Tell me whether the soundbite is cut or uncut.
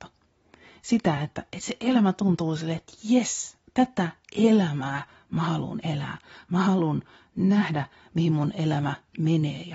uncut